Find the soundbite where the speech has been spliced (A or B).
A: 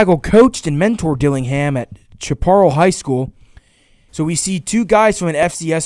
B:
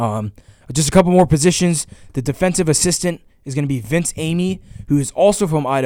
A